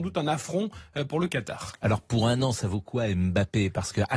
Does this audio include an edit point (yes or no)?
no